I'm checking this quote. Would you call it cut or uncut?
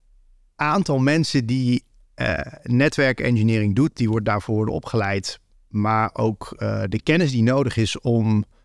uncut